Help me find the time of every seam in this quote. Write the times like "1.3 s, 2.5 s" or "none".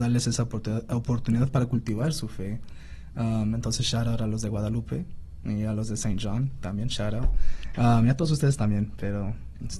7.7 s